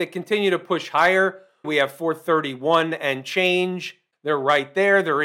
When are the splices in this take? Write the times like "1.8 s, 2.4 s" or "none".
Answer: 1.6 s, 4.1 s